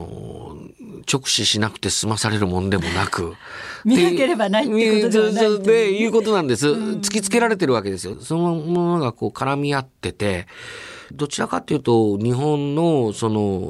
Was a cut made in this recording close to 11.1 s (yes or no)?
yes